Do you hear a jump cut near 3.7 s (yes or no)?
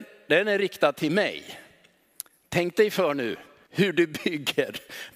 yes